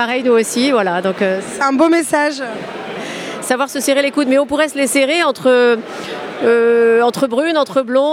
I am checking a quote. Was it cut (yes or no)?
no